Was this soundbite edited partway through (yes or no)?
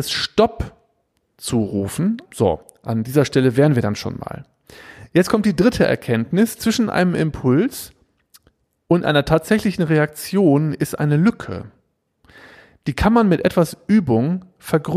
yes